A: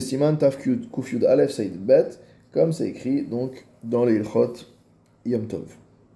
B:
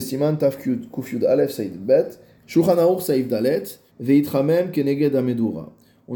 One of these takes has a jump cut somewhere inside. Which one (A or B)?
B